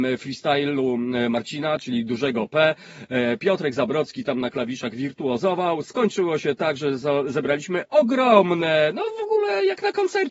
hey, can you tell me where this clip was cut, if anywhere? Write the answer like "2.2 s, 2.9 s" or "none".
none